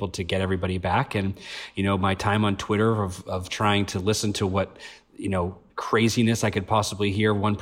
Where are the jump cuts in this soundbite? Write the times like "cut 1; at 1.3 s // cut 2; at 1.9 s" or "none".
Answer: cut 1; at 5.7 s